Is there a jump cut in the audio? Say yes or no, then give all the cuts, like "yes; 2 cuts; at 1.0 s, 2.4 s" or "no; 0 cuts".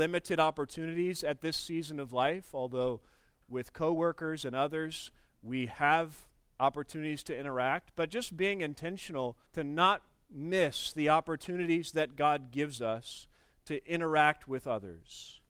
yes; 1 cut; at 9.5 s